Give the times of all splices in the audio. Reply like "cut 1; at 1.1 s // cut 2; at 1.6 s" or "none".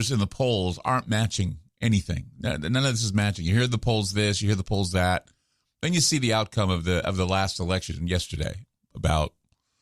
none